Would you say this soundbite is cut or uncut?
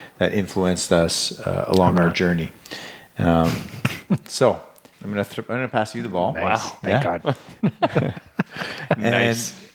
cut